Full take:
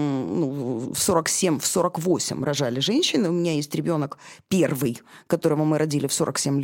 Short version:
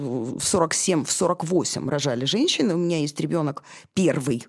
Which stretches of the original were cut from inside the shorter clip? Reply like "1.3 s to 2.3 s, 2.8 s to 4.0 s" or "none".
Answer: none